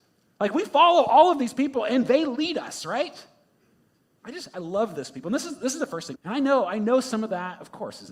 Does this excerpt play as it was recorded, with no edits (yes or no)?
no